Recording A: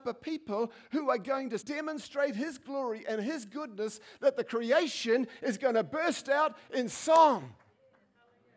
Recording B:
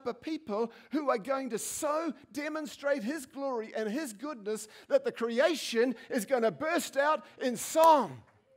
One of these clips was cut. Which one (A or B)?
A